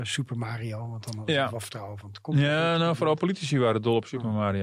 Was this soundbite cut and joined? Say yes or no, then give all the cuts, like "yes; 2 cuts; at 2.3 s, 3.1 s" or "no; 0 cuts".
no; 0 cuts